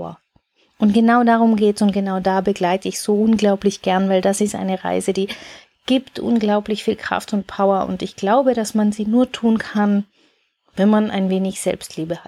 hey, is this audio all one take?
yes; 0 cuts

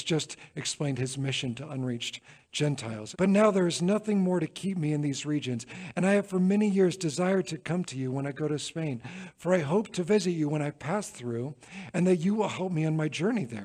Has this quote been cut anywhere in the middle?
yes; 1 cut; at 3.1 s

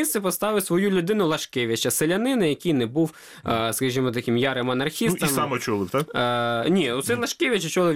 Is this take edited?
no; 0 cuts

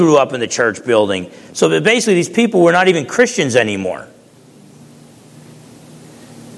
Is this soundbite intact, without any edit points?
yes; 0 cuts

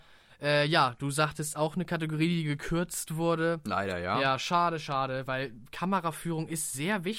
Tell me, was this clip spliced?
no; 0 cuts

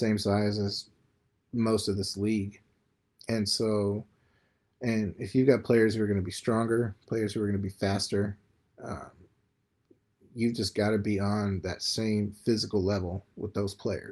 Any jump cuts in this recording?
no; 0 cuts

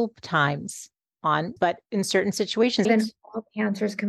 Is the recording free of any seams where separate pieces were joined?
no; 2 cuts; at 1.6 s, 2.9 s

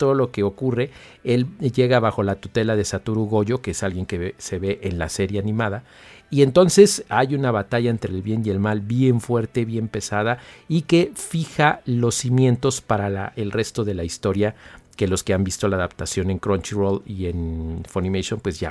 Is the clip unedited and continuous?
yes; 0 cuts

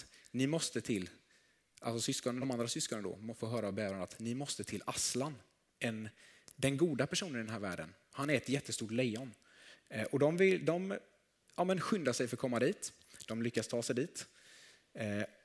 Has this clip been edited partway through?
no; 0 cuts

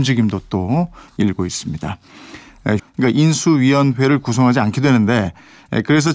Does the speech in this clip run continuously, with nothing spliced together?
no; 1 cut; at 2.8 s

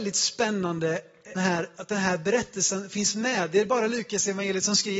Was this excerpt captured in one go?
no; 1 cut; at 1.4 s

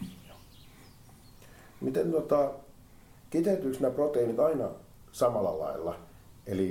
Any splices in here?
no; 0 cuts

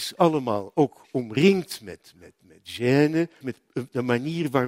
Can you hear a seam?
yes; 1 cut; at 3.4 s

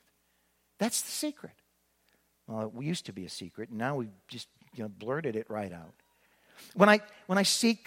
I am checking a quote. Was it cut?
no; 0 cuts

